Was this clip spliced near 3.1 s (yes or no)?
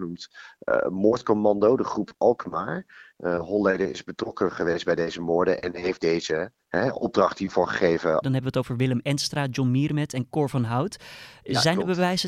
yes